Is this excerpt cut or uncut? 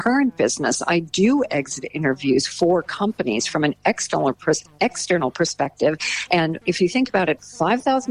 cut